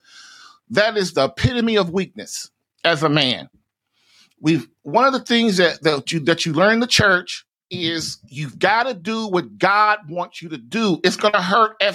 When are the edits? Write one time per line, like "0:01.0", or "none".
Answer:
none